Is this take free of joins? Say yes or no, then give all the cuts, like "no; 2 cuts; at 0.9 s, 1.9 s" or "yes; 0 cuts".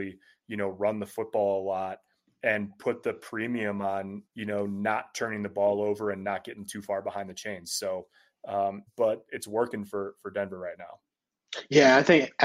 no; 2 cuts; at 4.3 s, 8.9 s